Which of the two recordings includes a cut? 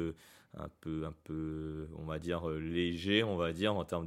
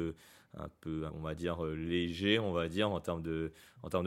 second; 1 cut; at 1.1 s

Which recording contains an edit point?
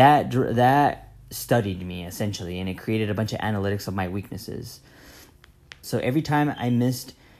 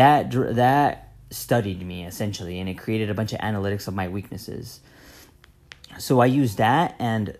first; 1 cut; at 5.8 s

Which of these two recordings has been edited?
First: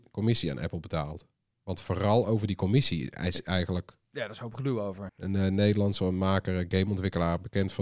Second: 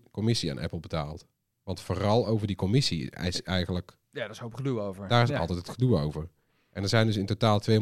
first; 1 cut; at 5.1 s

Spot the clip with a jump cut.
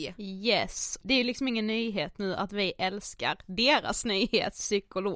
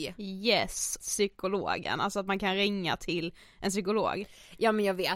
second; 1 cut; at 1.0 s

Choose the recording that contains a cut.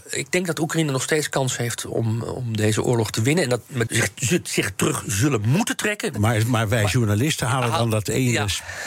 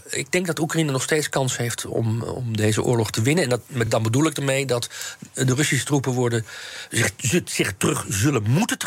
first; 2 cuts; at 3.9 s, 6.1 s

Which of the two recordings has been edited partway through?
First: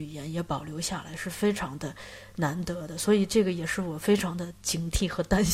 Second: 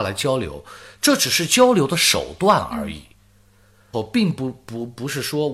second; 1 cut; at 3.9 s

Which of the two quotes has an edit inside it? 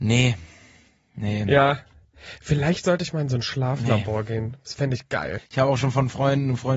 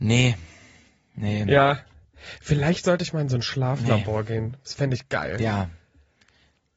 first; 1 cut; at 5.4 s

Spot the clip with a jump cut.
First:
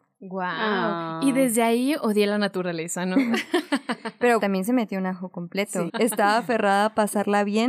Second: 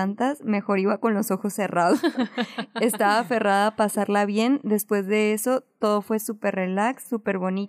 first; 2 cuts; at 4.4 s, 5.9 s

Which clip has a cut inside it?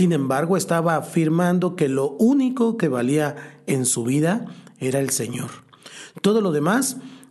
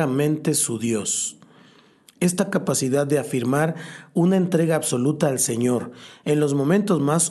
first; 1 cut; at 2.8 s

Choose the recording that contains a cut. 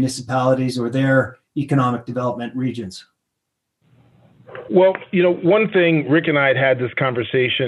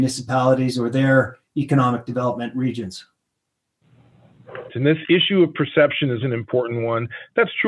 second; 2 cuts; at 4.7 s, 6.2 s

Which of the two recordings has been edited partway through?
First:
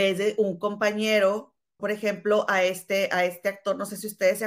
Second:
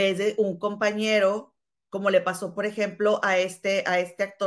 first; 1 cut; at 1.8 s

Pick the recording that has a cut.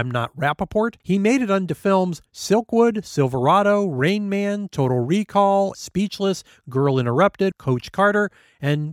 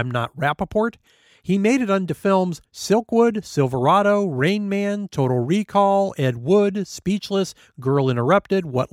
first; 3 cuts; at 1.0 s, 5.7 s, 7.5 s

